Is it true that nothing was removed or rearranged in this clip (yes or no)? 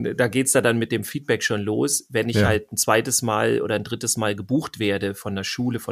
yes